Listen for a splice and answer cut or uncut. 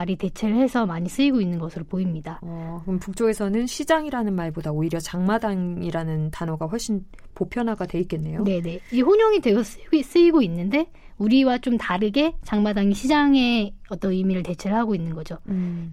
uncut